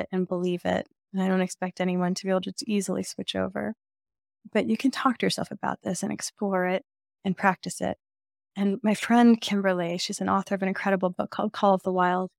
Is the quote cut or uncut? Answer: uncut